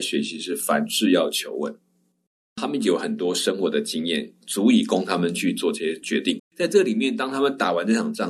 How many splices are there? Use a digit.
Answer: 1